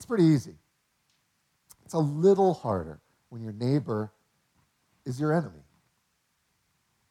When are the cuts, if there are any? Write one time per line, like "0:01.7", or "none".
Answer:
none